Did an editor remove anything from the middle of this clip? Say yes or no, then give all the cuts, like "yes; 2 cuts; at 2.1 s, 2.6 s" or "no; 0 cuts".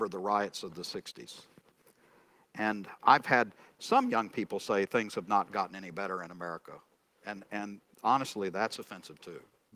no; 0 cuts